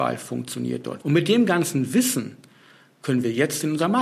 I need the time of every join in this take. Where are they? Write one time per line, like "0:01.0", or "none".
0:01.0